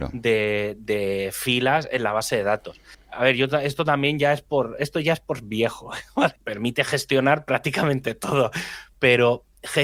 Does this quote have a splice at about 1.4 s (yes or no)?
no